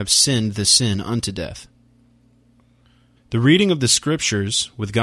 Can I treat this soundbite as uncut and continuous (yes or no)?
no